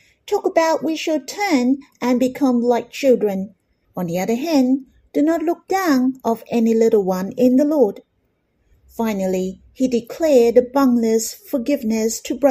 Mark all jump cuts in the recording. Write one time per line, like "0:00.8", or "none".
0:03.8
0:08.7

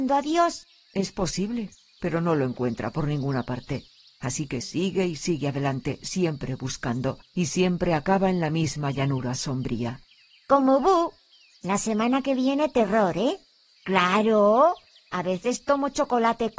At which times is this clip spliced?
0:04.6
0:13.8

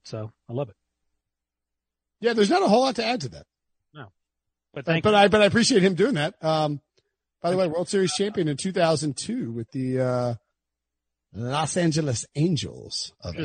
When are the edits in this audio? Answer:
none

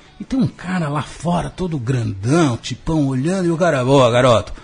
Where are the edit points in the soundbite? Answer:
none

